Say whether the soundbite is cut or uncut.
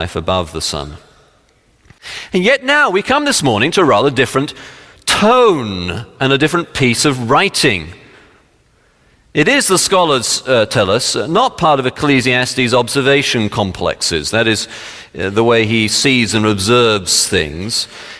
uncut